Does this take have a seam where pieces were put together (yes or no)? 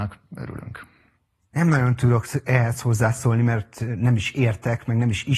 yes